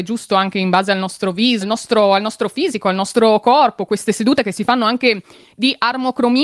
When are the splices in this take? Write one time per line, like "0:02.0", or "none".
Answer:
0:01.6

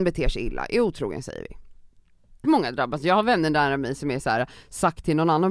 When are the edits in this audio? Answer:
0:02.4

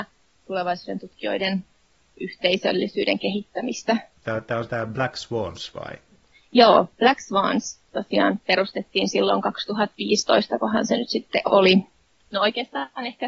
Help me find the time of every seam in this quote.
0:04.2
0:12.2

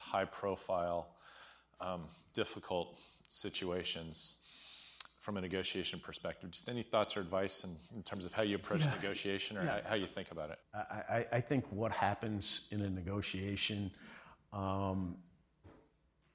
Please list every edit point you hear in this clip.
0:10.6

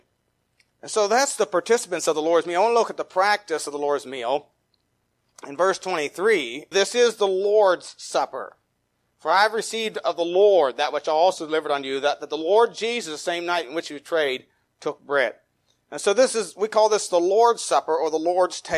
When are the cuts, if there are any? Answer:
0:06.7

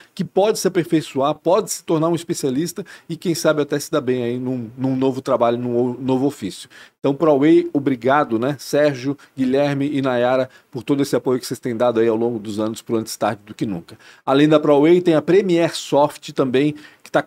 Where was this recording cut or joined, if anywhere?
none

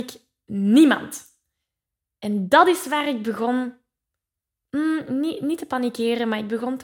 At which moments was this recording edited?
none

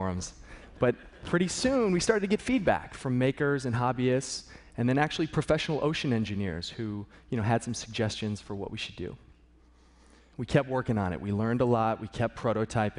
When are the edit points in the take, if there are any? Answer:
none

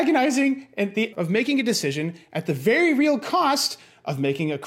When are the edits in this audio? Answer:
0:01.1

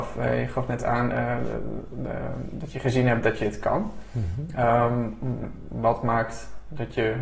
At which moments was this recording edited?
none

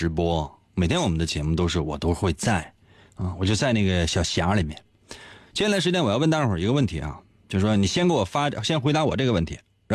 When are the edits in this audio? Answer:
none

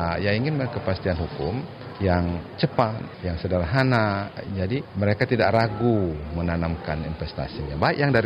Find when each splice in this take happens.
none

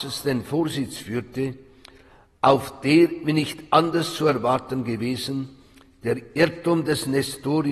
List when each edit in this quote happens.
none

